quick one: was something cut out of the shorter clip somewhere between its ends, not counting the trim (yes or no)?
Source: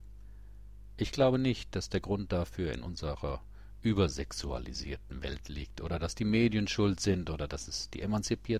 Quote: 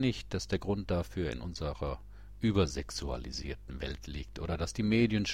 no